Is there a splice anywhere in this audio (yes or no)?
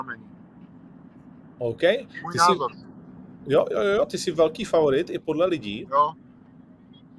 yes